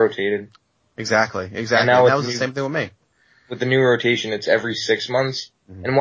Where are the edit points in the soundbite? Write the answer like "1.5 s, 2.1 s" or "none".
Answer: none